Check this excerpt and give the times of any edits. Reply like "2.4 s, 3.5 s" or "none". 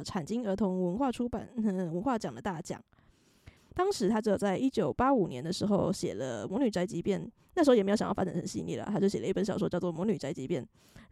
3.6 s